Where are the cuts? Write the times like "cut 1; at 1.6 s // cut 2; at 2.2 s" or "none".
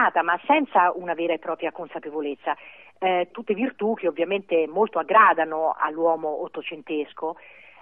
cut 1; at 3.3 s